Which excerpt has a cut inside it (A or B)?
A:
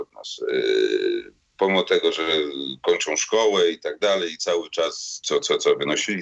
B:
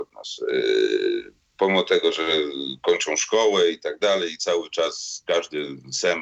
A